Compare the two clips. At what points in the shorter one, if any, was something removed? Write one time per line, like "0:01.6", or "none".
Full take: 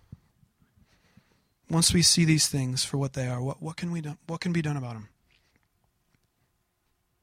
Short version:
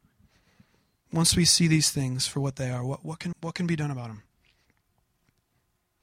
0:03.3